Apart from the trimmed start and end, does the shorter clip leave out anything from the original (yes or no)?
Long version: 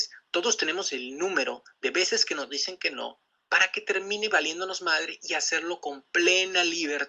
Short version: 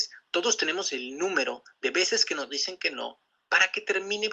no